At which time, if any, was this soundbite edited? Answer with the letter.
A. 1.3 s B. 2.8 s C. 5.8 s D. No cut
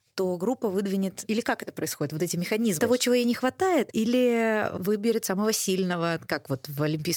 B